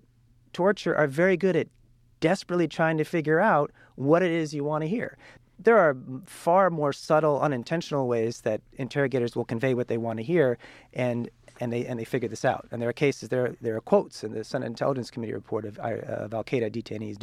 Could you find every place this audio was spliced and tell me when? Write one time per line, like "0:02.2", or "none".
none